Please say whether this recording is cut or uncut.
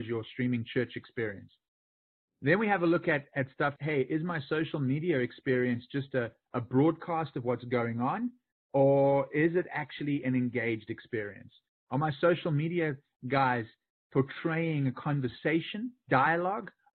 cut